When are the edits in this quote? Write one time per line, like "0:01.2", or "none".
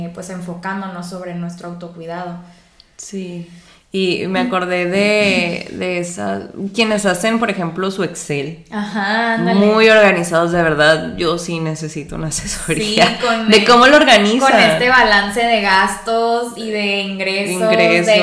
none